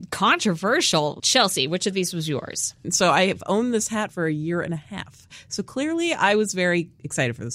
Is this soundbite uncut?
no; 2 cuts; at 1.2 s, 2.8 s

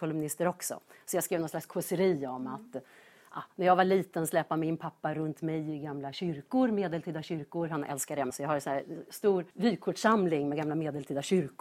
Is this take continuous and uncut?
no; 2 cuts; at 8.3 s, 9.5 s

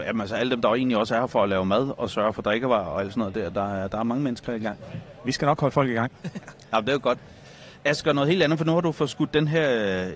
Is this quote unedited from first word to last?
yes; 0 cuts

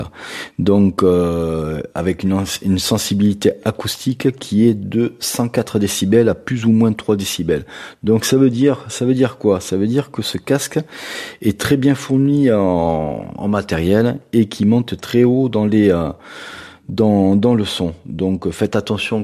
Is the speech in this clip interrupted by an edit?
no; 0 cuts

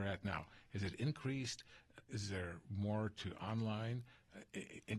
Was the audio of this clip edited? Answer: no; 0 cuts

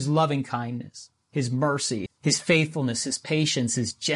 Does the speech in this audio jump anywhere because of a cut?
yes; 1 cut; at 2.1 s

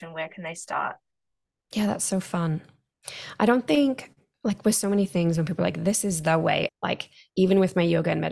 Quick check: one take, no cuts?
no; 1 cut; at 6.7 s

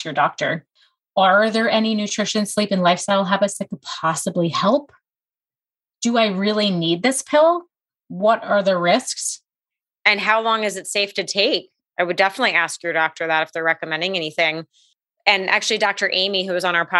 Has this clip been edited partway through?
yes; 1 cut; at 10.0 s

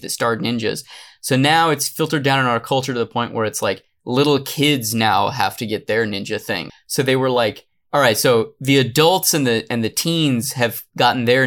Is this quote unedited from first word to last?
no; 1 cut; at 6.7 s

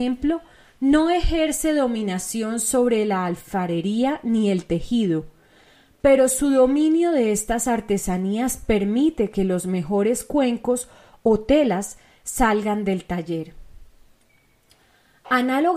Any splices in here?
no; 0 cuts

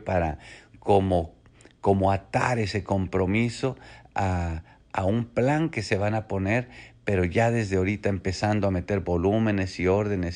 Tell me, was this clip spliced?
no; 0 cuts

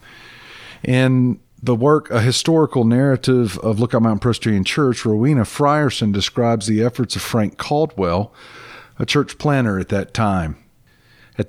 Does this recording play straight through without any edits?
yes; 0 cuts

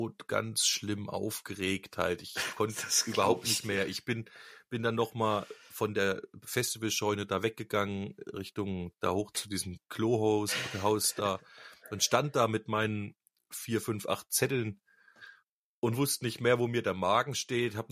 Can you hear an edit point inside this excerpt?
yes; 1 cut; at 9.8 s

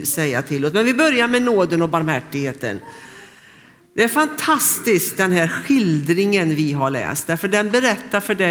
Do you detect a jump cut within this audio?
no; 0 cuts

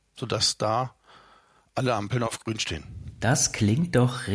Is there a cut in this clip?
no; 0 cuts

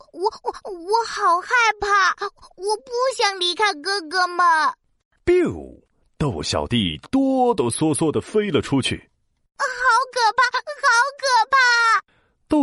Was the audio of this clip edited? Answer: no; 0 cuts

